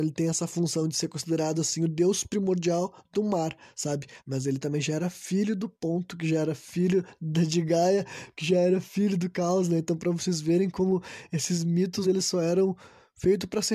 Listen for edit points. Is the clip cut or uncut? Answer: cut